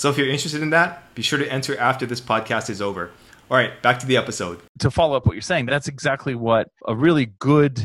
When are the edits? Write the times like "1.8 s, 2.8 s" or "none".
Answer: 5.7 s